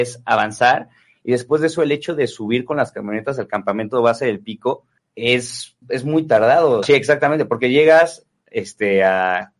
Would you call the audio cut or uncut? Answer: cut